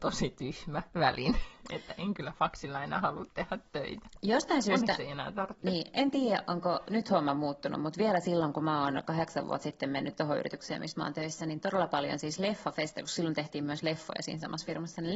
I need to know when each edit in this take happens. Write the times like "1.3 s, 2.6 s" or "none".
none